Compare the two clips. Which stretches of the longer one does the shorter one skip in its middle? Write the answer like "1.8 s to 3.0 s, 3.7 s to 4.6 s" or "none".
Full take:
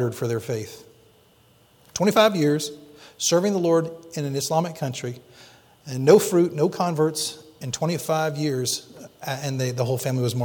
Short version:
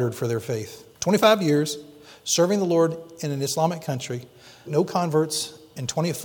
0.9 s to 1.9 s, 5.6 s to 6.5 s